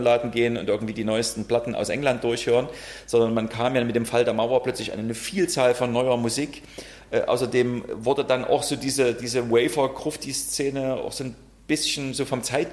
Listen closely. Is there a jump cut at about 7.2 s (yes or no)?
no